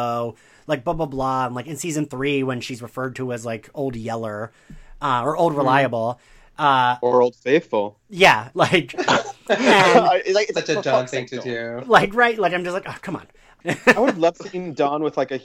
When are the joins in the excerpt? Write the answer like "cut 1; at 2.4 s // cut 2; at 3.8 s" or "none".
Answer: cut 1; at 8.5 s